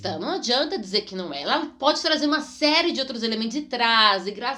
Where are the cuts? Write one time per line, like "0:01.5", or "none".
none